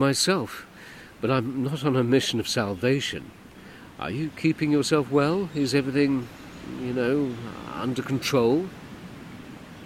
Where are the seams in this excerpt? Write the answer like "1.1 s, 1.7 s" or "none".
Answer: none